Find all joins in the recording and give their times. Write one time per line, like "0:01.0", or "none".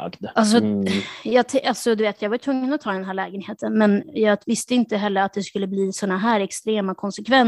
none